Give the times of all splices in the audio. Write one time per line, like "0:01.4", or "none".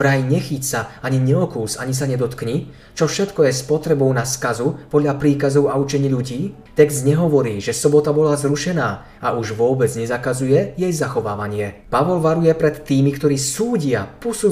0:06.7